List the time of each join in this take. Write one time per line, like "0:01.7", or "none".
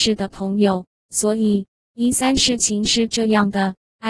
0:01.8